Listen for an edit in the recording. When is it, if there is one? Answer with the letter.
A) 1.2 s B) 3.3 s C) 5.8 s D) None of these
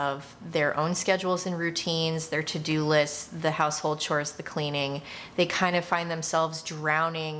D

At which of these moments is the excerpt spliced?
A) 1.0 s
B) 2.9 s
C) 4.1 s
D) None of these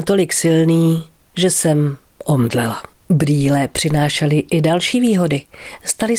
B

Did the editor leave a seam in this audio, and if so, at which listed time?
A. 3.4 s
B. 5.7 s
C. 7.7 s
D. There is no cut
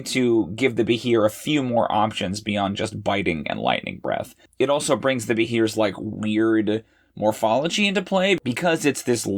A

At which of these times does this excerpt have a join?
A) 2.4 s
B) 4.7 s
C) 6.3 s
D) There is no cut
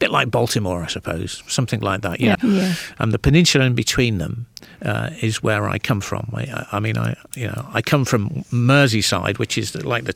A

